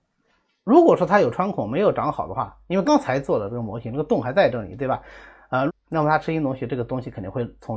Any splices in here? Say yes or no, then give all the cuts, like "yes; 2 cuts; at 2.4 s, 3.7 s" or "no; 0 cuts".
yes; 2 cuts; at 2.9 s, 5.7 s